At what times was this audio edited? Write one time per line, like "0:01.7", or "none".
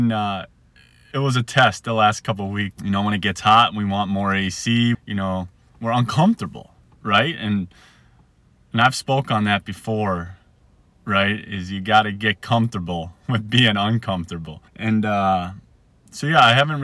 0:02.7
0:04.9
0:14.7

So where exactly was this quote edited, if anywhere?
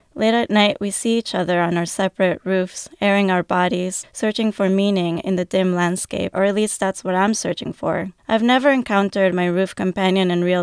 0:04.0
0:06.3
0:08.2

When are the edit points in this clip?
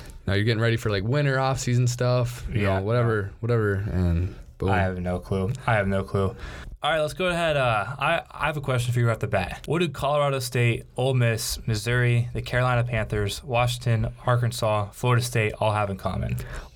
0:09.7

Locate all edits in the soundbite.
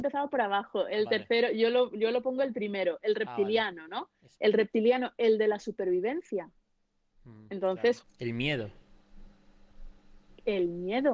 0:04.4
0:08.0

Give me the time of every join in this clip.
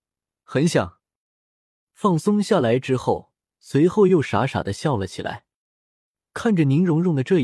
0:01.7
0:03.5

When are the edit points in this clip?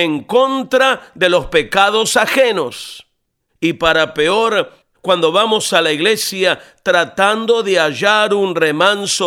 0:03.5
0:04.9

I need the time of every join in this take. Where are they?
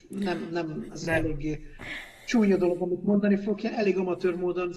none

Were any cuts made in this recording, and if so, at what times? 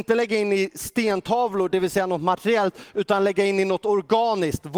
none

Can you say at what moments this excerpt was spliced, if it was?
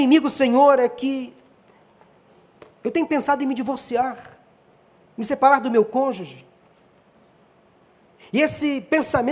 none

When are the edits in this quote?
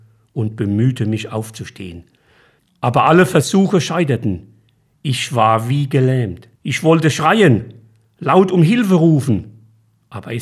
0:06.6

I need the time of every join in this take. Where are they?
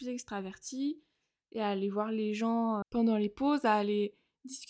0:02.8

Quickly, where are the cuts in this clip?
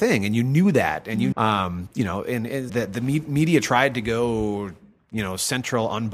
0:01.3
0:02.7

